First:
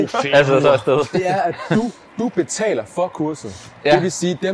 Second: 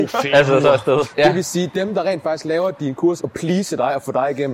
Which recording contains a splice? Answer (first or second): second